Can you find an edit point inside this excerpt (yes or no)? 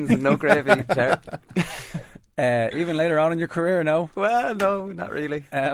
no